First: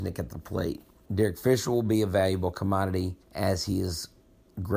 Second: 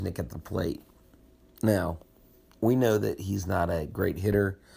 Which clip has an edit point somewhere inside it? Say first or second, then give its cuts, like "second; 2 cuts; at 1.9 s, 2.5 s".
first; 2 cuts; at 1.1 s, 3.2 s